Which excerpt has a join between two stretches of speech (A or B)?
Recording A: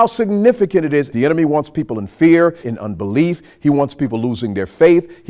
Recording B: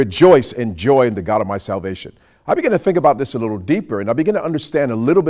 A